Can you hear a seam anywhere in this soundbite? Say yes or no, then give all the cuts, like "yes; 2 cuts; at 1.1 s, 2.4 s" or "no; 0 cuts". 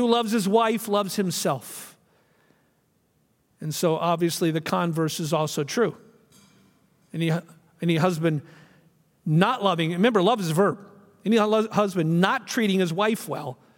no; 0 cuts